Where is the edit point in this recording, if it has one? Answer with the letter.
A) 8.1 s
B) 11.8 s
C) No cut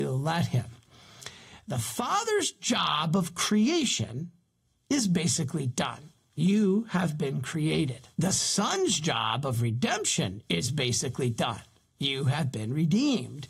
A